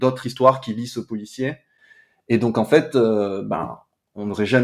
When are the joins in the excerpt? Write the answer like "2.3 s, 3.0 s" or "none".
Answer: none